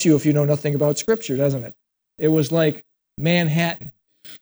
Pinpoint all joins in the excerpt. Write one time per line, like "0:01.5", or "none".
0:02.1